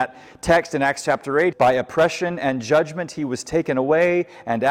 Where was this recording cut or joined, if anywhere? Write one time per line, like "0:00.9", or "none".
0:01.5